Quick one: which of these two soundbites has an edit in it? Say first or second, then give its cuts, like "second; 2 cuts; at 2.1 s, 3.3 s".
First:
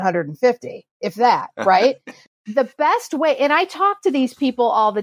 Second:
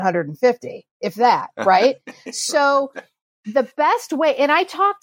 first; 1 cut; at 2.3 s